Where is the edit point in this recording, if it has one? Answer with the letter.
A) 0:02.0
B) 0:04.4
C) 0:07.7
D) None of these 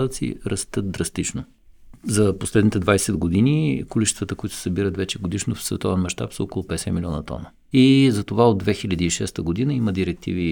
C